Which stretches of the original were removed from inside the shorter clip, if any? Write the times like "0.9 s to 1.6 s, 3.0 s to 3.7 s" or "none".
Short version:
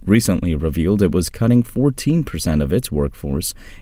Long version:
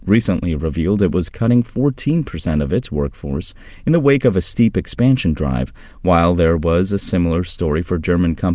none